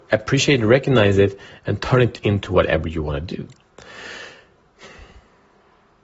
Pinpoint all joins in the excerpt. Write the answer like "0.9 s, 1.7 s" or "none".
none